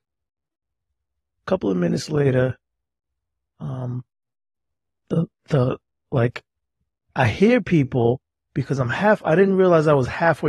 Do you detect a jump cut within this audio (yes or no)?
no